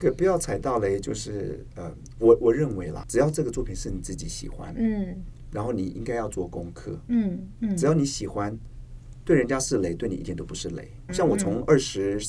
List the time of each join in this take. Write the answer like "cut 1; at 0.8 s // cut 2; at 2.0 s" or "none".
cut 1; at 11.1 s